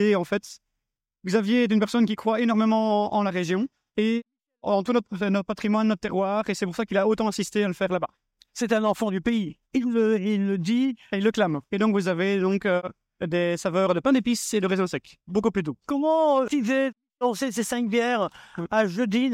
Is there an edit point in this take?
yes; 1 cut; at 11.6 s

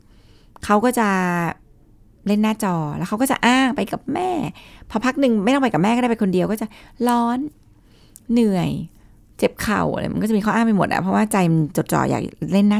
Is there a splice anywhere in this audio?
no; 0 cuts

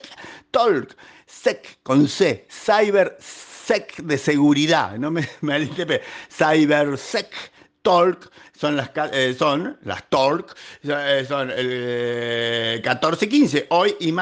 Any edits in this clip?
no; 0 cuts

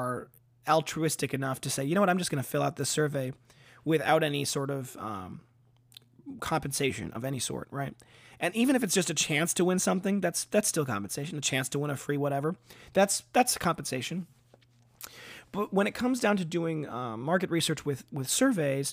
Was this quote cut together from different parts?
no; 0 cuts

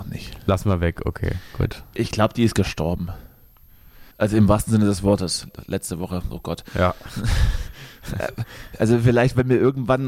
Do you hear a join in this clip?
yes; 1 cut; at 4.1 s

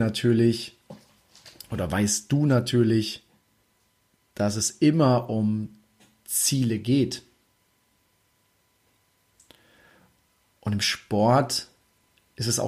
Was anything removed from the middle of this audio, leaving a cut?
no; 0 cuts

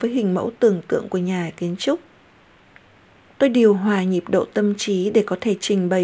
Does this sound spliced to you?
yes; 1 cut; at 3.3 s

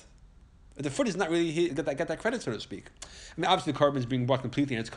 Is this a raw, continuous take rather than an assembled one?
no; 1 cut; at 1.7 s

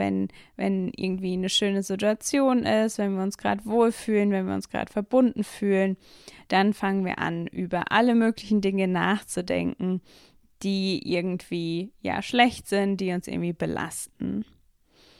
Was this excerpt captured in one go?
yes; 0 cuts

